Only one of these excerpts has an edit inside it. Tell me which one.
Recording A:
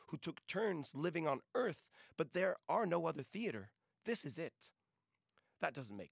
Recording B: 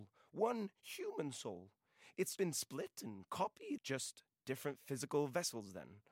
B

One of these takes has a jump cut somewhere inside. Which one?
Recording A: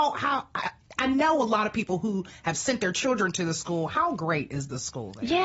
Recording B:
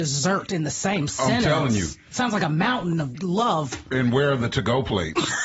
B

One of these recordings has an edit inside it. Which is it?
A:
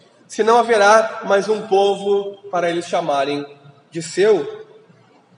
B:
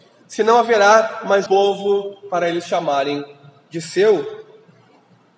B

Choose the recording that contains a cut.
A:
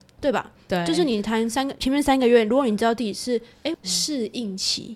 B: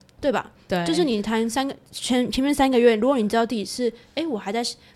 A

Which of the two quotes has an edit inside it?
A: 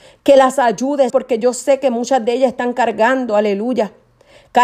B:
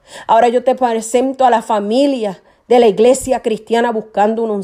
A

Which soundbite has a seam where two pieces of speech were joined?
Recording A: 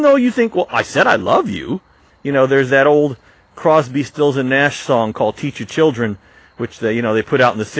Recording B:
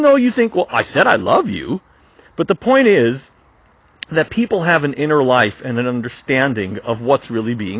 A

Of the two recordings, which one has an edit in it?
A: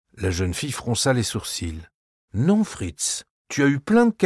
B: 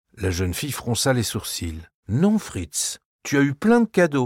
B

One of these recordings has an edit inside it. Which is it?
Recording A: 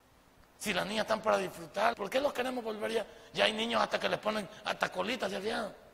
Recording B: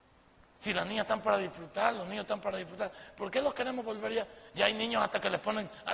A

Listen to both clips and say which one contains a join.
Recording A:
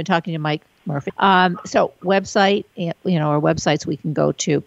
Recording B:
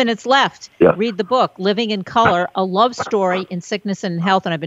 A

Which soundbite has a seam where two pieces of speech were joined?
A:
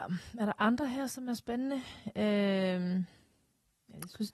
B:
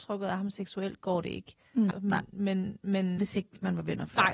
B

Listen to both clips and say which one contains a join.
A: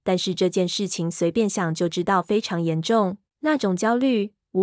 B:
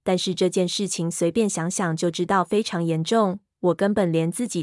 A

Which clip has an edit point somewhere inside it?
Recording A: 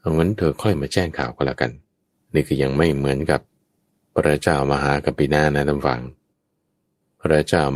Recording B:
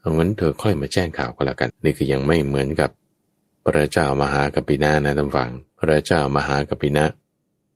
B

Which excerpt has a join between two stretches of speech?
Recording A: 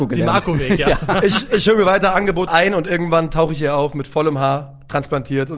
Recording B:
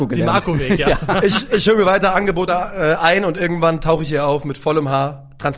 A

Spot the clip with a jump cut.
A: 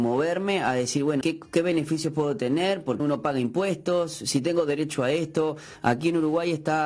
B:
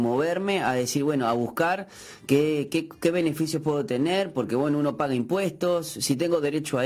A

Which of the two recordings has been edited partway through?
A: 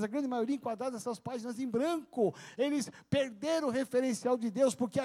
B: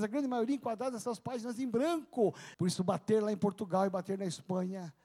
B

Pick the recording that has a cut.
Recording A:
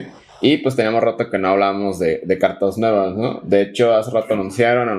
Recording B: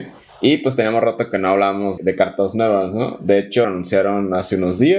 B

